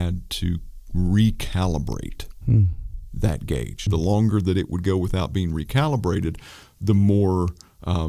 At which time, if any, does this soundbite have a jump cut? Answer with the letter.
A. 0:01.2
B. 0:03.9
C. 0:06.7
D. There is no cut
B